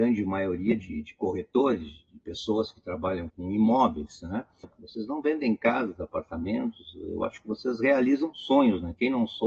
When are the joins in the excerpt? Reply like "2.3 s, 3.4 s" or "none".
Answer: 3.3 s, 4.6 s

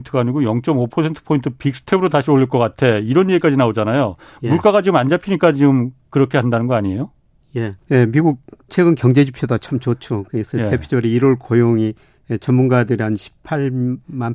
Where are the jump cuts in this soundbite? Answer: 7.8 s

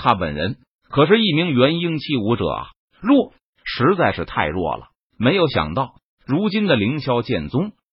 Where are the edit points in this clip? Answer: none

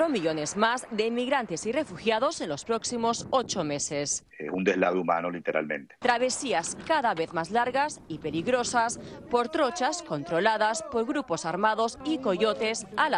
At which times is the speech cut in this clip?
6.0 s

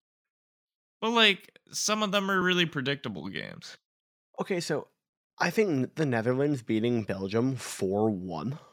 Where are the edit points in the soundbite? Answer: none

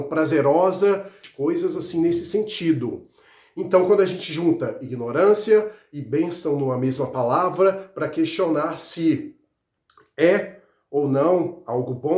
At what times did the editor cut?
none

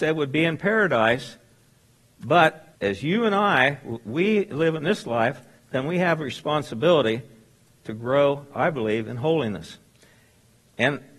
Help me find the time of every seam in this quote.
2.7 s

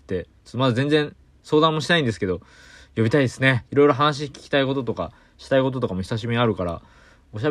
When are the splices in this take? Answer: 3.6 s

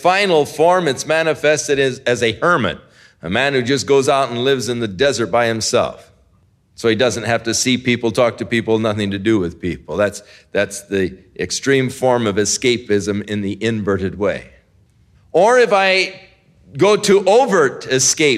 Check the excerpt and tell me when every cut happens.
none

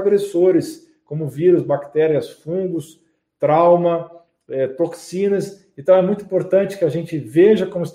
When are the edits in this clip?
none

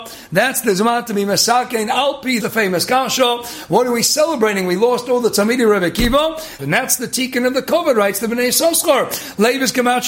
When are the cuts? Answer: 2.4 s, 6.6 s

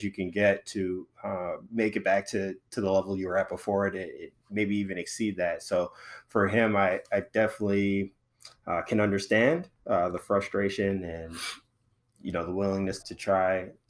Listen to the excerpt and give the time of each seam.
13.0 s

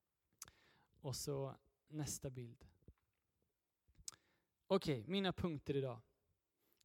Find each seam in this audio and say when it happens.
1.9 s

